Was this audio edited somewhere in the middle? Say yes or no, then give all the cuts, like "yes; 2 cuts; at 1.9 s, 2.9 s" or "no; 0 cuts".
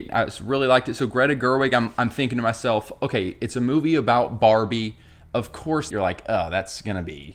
yes; 1 cut; at 5.9 s